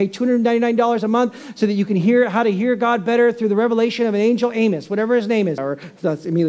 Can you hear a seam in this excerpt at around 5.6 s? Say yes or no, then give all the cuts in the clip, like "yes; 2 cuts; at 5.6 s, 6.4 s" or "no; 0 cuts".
yes; 1 cut; at 5.6 s